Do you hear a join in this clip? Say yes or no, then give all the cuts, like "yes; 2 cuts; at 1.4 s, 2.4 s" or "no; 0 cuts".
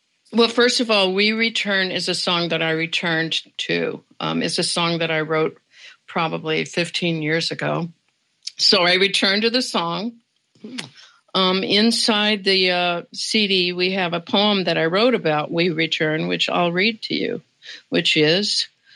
no; 0 cuts